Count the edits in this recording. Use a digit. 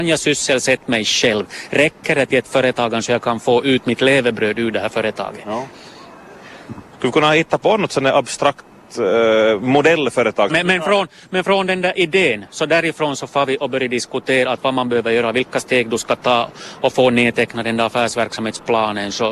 1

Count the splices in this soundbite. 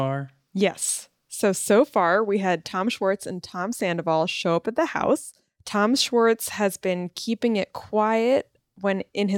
0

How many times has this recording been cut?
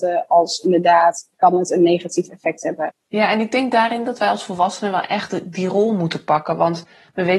0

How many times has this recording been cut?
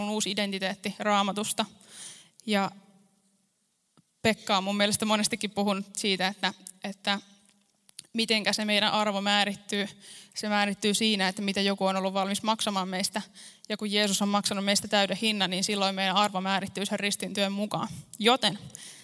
0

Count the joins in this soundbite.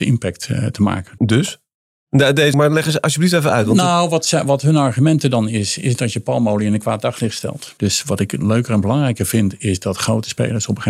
3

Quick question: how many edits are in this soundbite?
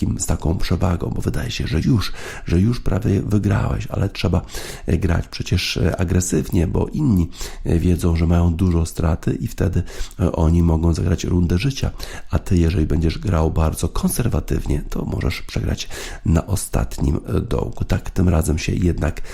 1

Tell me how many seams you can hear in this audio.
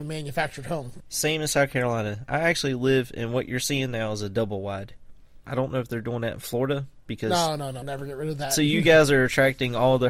3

